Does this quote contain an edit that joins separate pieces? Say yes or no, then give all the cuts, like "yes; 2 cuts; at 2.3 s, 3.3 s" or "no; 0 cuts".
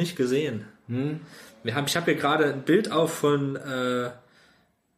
no; 0 cuts